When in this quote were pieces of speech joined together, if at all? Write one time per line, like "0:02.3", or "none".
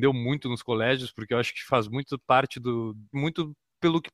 0:03.1